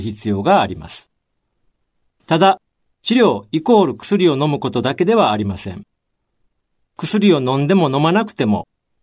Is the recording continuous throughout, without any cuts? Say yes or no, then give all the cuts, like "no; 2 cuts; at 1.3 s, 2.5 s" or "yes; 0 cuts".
yes; 0 cuts